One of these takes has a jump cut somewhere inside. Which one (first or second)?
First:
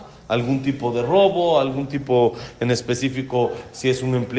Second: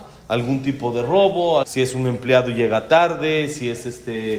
second